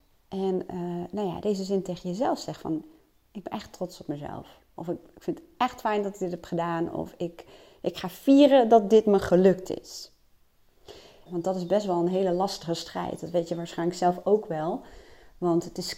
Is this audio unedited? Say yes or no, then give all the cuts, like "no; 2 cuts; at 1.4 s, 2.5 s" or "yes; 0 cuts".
no; 1 cut; at 11.3 s